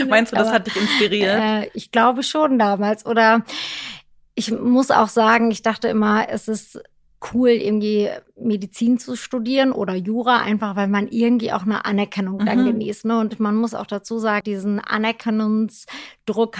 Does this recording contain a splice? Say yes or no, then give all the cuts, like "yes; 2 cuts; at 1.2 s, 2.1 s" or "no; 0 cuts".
yes; 1 cut; at 14.4 s